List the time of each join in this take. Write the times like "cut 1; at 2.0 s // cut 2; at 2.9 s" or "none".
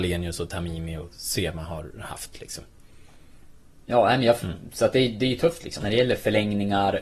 cut 1; at 3.8 s // cut 2; at 5.8 s